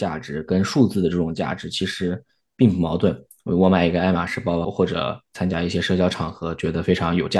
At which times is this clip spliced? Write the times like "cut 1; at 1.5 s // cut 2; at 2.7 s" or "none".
cut 1; at 4.6 s